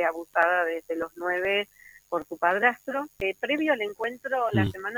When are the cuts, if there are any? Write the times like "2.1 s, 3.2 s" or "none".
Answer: 3.2 s